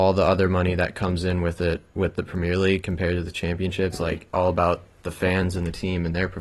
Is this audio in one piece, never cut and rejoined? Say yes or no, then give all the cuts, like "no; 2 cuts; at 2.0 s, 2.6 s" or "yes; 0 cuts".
no; 1 cut; at 3.9 s